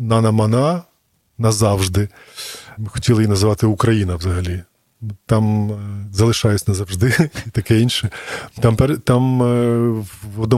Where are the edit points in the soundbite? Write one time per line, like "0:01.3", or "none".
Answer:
0:02.8